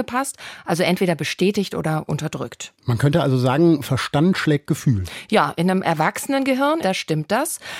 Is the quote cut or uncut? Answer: cut